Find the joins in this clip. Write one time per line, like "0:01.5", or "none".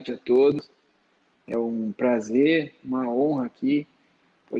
none